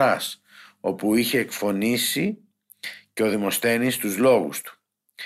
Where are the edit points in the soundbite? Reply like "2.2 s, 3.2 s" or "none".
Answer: none